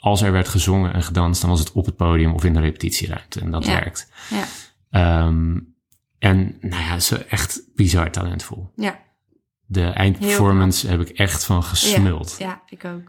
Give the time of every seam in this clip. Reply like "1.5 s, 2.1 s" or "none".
none